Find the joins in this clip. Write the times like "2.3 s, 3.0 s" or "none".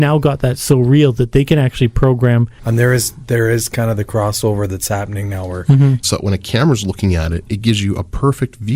2.6 s, 6.0 s